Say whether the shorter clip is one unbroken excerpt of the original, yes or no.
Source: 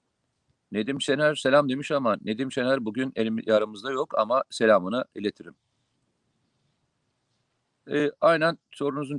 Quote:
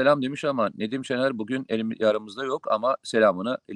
yes